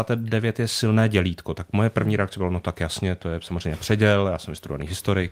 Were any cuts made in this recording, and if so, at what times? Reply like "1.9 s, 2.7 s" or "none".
none